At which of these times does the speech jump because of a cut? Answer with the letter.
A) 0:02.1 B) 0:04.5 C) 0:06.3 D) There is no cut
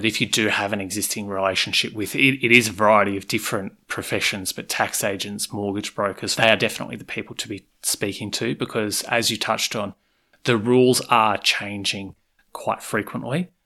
C